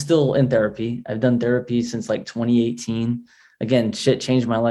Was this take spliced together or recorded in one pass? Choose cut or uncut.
uncut